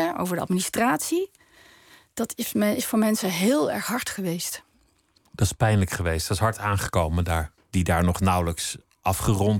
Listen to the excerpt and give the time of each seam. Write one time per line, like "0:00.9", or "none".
0:07.6